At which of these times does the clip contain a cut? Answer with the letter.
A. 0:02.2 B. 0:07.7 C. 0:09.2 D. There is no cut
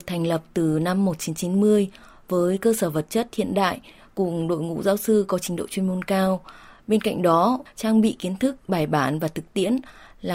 B